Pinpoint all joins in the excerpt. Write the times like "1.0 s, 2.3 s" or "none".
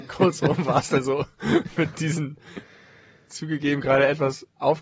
none